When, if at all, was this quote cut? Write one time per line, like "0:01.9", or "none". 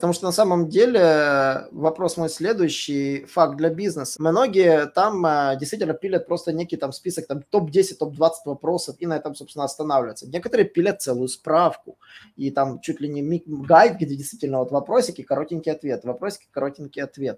0:04.2